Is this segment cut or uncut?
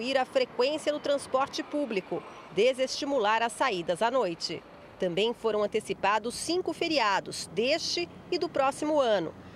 cut